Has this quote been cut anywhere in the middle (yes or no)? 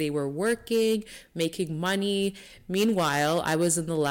no